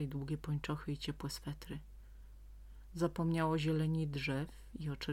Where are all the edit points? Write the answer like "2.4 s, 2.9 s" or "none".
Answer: none